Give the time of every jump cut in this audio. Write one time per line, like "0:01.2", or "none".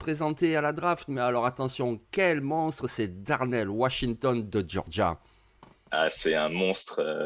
none